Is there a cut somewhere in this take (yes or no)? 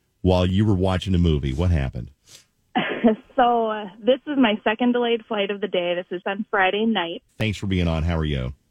yes